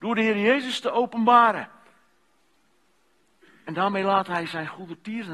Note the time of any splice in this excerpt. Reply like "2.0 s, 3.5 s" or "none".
none